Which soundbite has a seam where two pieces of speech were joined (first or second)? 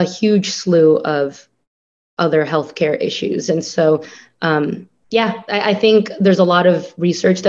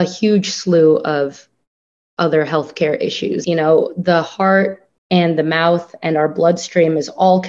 second